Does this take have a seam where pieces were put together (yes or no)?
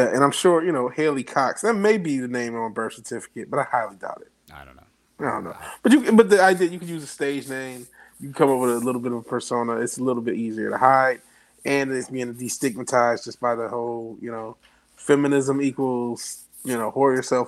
yes